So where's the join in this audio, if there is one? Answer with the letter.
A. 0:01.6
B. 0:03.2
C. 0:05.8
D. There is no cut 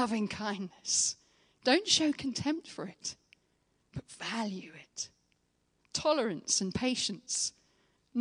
C